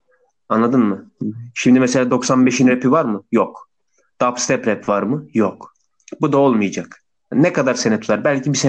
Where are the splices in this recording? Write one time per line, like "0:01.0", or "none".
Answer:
none